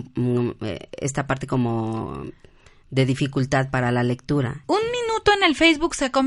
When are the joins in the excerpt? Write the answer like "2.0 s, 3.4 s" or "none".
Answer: 4.6 s